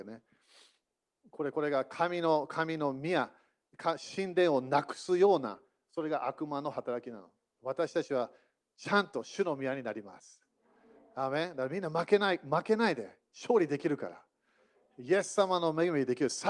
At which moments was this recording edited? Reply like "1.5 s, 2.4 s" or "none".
none